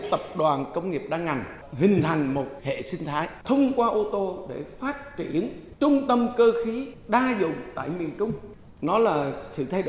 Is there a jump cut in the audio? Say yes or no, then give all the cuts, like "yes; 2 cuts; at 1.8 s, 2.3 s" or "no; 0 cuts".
no; 0 cuts